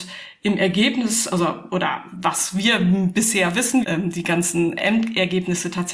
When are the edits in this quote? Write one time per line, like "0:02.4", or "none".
0:03.8